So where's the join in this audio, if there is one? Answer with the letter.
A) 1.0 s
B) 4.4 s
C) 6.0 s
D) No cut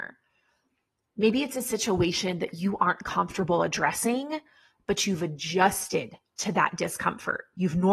A